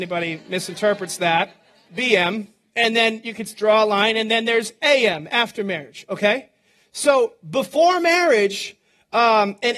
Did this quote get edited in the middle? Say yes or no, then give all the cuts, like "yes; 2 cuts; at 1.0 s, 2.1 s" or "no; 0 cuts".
yes; 1 cut; at 1.9 s